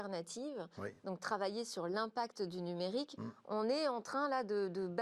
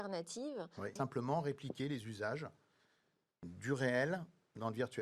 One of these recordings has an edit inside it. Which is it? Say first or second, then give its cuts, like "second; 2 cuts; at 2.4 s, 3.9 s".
second; 1 cut; at 1.0 s